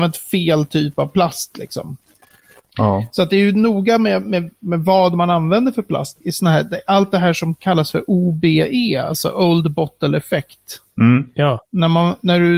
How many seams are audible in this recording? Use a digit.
1